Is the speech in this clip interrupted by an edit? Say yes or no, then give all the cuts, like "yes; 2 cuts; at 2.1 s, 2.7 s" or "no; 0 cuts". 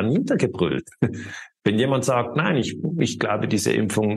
no; 0 cuts